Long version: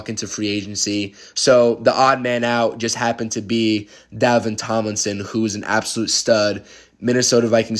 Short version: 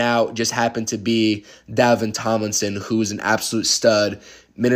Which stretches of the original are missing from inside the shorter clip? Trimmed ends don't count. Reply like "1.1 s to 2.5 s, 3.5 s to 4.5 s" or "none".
none